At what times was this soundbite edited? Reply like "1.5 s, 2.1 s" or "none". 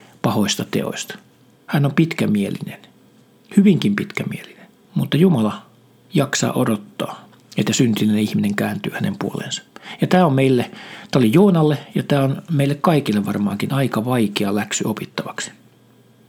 1.5 s, 4.8 s